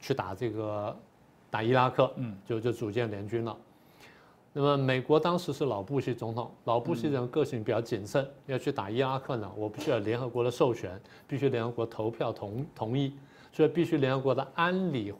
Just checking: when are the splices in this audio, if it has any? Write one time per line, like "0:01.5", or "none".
0:08.5